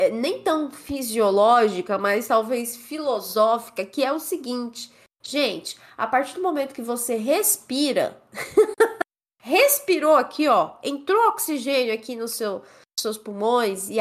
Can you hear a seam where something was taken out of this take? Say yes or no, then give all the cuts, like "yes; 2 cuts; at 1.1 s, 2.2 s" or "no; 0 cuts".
no; 0 cuts